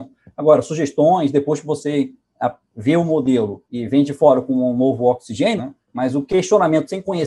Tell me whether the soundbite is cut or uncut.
cut